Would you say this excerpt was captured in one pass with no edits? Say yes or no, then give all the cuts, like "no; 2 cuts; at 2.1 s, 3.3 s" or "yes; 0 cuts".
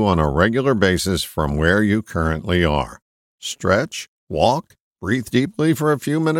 yes; 0 cuts